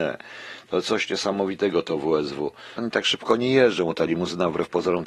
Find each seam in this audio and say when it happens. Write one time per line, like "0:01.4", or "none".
0:02.8